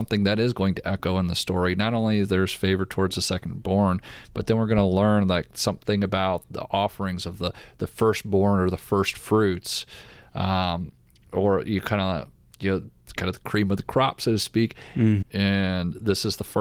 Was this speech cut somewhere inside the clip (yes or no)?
yes